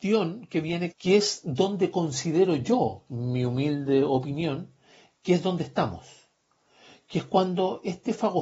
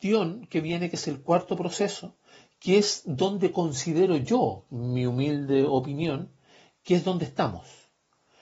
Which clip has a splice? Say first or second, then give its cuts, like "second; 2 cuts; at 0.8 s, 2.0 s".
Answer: first; 1 cut; at 0.9 s